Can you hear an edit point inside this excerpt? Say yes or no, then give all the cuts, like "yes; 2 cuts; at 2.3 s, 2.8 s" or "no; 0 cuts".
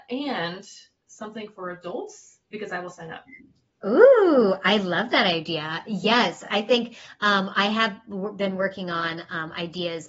no; 0 cuts